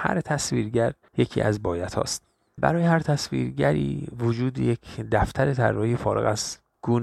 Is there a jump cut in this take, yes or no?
no